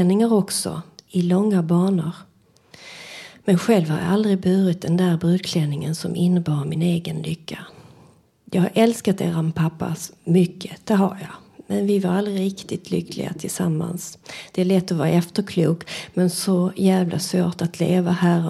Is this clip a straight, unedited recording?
yes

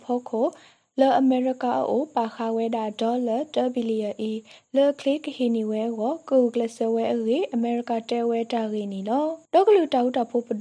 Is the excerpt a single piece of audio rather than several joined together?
no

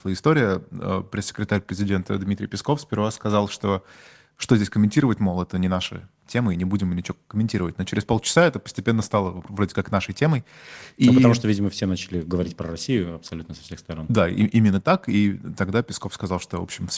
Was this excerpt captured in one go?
yes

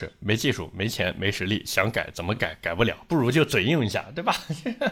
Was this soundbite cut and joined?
no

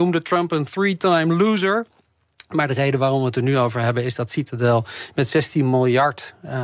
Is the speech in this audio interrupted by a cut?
no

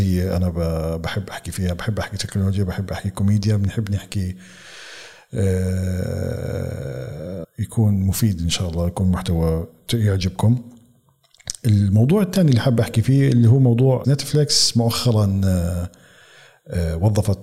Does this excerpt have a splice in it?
yes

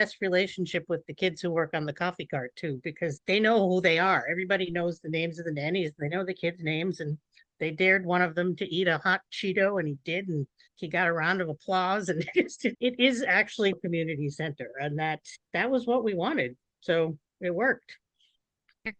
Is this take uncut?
no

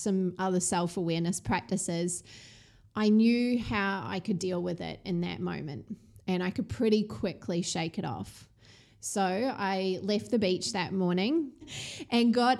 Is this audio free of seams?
no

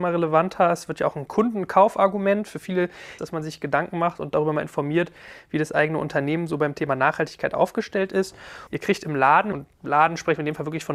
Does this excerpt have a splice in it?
yes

